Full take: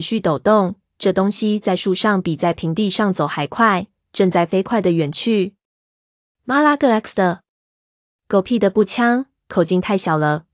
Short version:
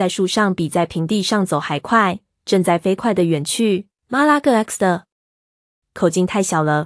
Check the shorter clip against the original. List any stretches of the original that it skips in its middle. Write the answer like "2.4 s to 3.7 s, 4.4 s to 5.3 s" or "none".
5.6 s to 6.3 s, 8.2 s to 9.4 s

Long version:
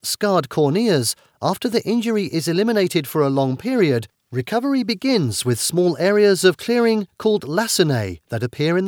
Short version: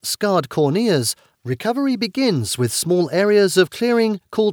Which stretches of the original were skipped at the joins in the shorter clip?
1.3 s to 4.2 s

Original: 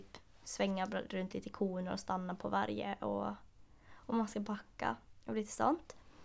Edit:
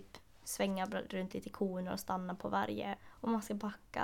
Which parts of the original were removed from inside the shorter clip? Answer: 3.0 s to 3.8 s

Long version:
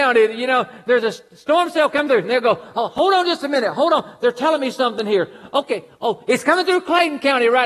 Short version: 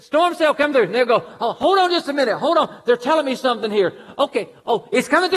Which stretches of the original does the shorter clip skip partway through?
none

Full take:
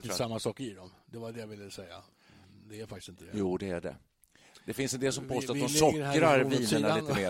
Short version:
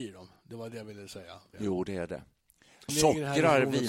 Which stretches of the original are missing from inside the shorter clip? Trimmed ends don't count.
2.2 s to 3.3 s, 4.6 s to 5.7 s

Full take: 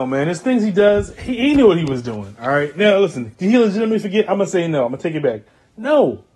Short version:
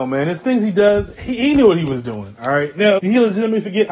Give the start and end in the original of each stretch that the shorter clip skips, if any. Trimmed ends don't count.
3.0 s to 3.4 s

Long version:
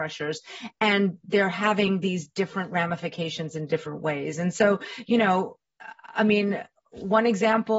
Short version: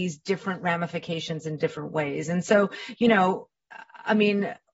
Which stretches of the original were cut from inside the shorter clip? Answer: none

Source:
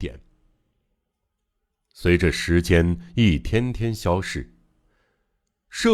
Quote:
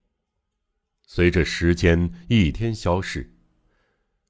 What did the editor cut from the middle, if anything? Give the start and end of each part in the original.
3.4 s to 3.7 s

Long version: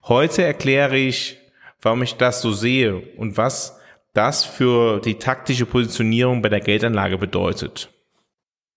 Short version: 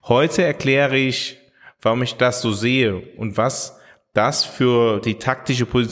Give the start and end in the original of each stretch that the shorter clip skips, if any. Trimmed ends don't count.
none

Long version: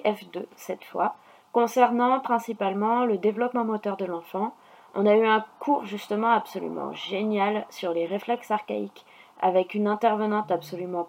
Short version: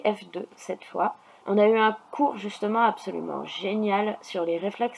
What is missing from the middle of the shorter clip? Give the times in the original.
1.4 s to 4.9 s

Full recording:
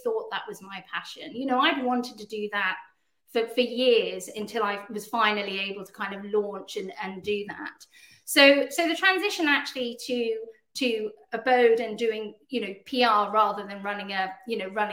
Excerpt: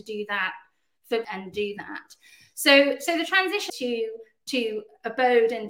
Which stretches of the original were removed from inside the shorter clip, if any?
3.5 s to 6.9 s, 9.4 s to 10.0 s

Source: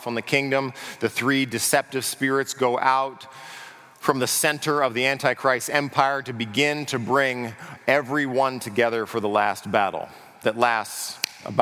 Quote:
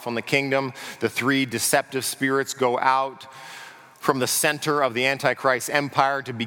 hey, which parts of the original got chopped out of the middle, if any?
none

